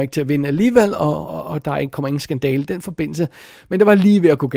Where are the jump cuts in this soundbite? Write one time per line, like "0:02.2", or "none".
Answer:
0:01.3